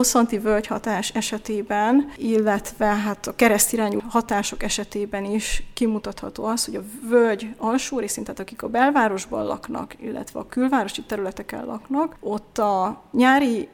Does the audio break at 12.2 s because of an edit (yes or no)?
no